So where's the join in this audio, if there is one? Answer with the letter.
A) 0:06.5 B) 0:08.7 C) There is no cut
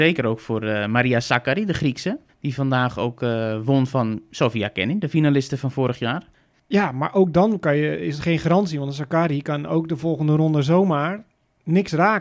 A